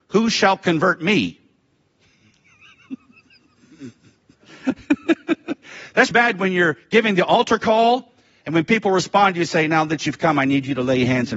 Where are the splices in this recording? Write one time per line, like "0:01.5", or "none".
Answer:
0:06.1